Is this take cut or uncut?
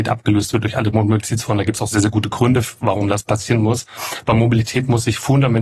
uncut